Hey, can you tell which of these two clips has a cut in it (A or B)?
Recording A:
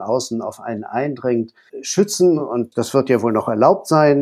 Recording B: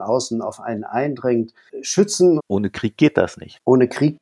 B